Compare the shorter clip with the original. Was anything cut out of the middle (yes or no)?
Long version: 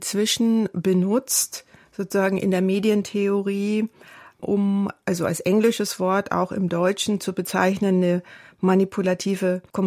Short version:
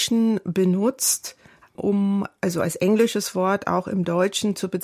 yes